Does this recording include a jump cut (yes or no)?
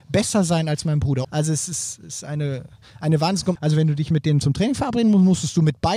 yes